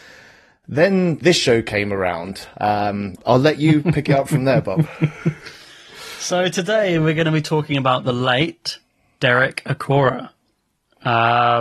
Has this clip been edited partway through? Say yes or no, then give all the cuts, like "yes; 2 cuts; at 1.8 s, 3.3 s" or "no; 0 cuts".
yes; 1 cut; at 3.2 s